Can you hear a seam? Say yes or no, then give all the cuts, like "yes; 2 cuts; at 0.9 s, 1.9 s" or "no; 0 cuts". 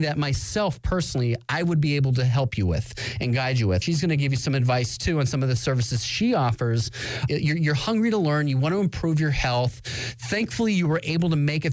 yes; 2 cuts; at 3.8 s, 7.3 s